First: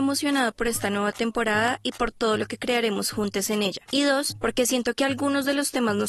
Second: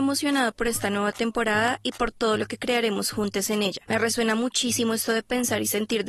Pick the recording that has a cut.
first; 1 cut; at 3.9 s

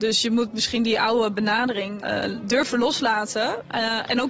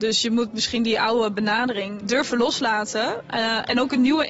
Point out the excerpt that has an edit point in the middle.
second; 1 cut; at 2.0 s

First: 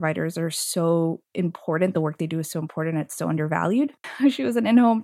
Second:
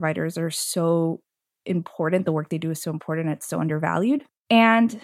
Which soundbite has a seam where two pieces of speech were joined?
first; 2 cuts; at 1.3 s, 4.0 s

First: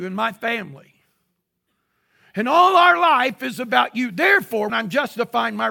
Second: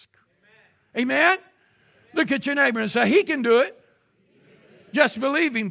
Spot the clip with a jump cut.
first; 1 cut; at 4.7 s

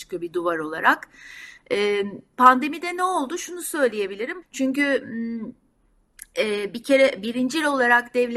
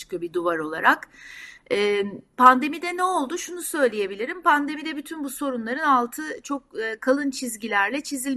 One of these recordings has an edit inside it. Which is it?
first; 1 cut; at 4.4 s

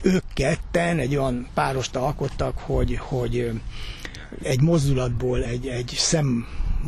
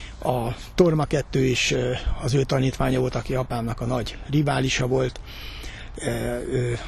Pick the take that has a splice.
first; 2 cuts; at 4.4 s, 5.4 s

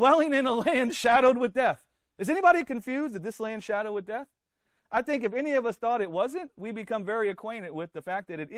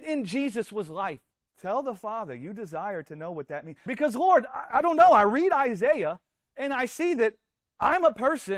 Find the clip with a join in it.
second; 2 cuts; at 1.5 s, 3.9 s

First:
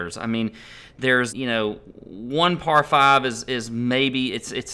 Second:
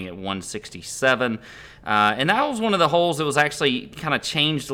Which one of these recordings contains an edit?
first; 1 cut; at 1.3 s

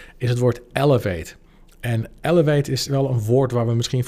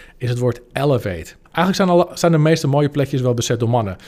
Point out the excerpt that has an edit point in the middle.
second; 1 cut; at 1.5 s

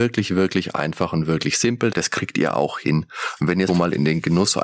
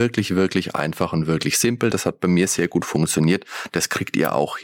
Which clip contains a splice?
first; 2 cuts; at 1.9 s, 3.7 s

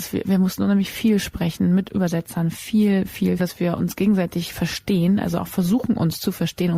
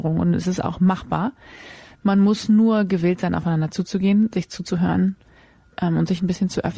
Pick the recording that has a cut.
first; 1 cut; at 3.4 s

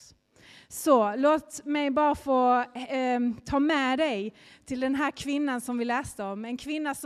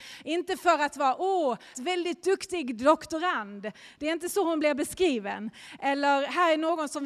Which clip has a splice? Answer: second; 1 cut; at 1.7 s

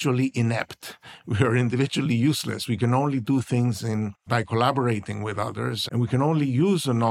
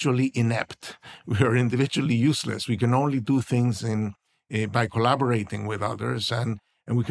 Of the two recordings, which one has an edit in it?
first; 2 cuts; at 4.3 s, 5.9 s

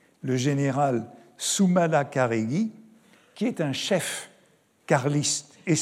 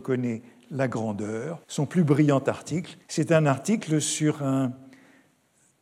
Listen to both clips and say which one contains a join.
second; 2 cuts; at 1.6 s, 3.0 s

